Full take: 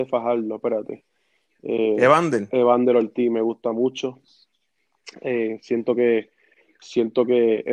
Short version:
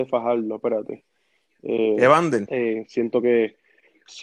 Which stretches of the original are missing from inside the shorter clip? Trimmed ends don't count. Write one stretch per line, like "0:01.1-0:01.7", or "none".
0:02.5-0:05.2